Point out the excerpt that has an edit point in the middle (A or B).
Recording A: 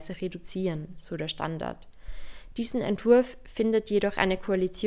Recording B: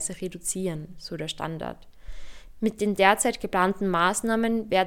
B